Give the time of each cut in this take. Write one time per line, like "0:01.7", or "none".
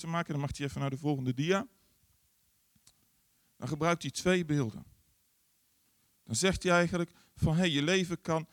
none